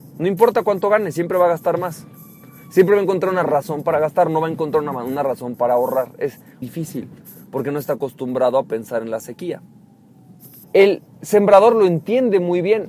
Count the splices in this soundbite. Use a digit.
2